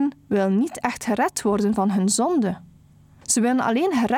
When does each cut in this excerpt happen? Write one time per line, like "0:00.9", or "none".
none